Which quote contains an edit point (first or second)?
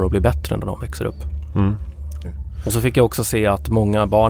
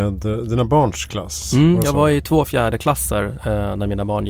first